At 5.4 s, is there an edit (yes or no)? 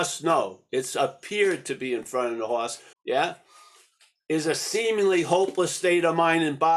no